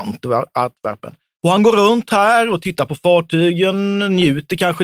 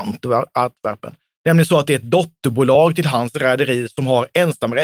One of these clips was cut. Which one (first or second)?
first